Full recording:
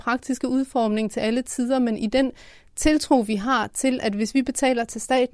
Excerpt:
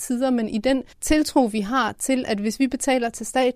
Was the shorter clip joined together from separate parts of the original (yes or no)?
yes